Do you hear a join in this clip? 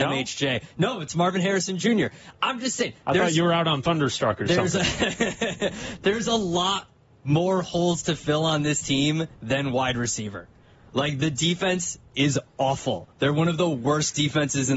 no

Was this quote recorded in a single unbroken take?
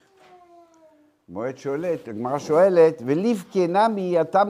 yes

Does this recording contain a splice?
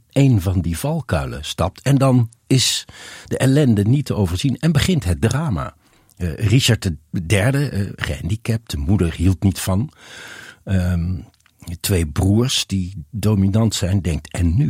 no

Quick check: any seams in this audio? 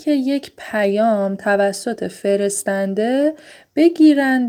no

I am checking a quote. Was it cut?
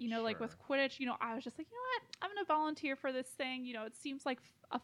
no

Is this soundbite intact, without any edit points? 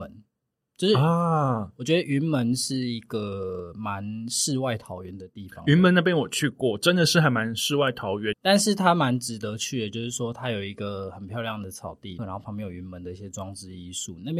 no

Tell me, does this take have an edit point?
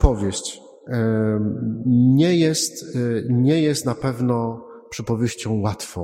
no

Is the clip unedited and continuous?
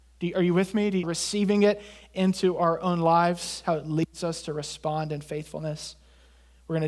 no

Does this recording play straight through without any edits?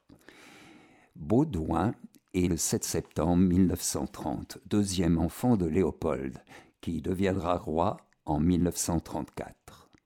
no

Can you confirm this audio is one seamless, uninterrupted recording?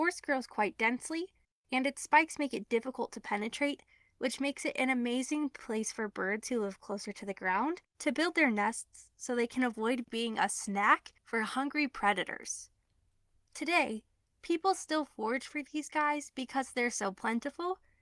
no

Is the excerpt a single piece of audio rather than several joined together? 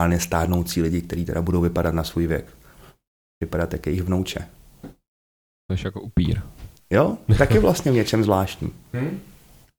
yes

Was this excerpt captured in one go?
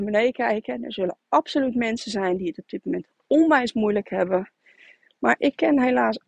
yes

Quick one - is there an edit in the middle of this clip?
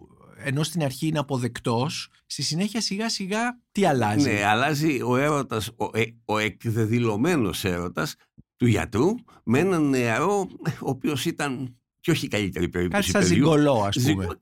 no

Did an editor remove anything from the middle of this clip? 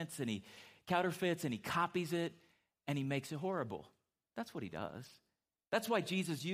no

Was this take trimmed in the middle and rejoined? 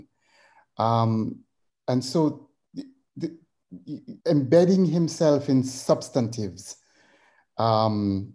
yes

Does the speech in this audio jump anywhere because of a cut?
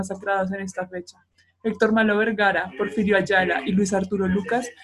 no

